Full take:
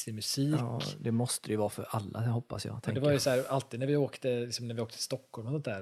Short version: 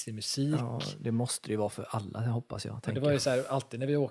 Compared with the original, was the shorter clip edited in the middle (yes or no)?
no